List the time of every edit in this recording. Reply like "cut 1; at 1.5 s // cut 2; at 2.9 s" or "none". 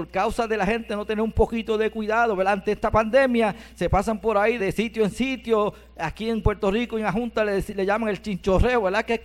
cut 1; at 4.6 s